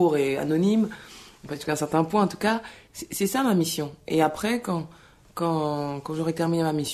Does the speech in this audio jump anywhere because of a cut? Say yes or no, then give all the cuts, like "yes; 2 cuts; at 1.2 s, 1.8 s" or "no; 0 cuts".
yes; 1 cut; at 2.9 s